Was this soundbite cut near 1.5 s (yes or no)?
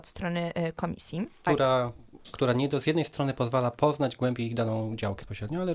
yes